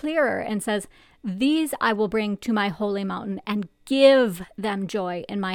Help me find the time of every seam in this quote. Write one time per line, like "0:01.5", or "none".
none